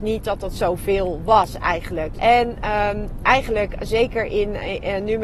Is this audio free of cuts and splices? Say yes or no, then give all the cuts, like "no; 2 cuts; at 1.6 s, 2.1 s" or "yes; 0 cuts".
no; 1 cut; at 2.1 s